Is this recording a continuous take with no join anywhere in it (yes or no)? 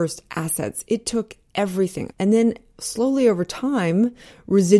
no